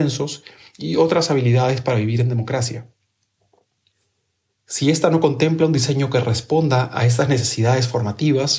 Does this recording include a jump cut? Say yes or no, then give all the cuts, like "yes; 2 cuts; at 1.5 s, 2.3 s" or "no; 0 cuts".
yes; 1 cut; at 4.5 s